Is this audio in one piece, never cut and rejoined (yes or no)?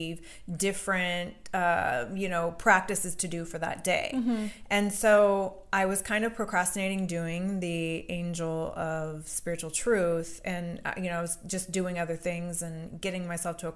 yes